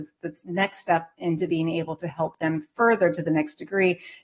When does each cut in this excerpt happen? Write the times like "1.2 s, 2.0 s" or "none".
none